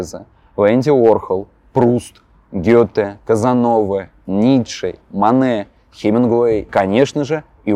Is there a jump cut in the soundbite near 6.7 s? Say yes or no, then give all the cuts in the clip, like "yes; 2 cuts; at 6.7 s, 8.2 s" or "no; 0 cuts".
yes; 2 cuts; at 5.0 s, 6.7 s